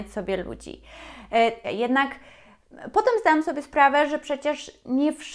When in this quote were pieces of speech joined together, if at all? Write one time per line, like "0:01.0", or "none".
0:01.6